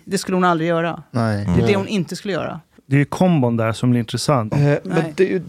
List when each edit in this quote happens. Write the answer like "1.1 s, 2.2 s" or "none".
2.8 s, 4.5 s